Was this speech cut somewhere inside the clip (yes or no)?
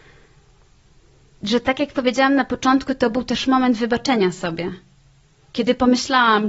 no